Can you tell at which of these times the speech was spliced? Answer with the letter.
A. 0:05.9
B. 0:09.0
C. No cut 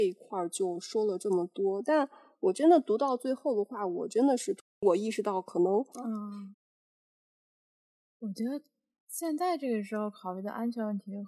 A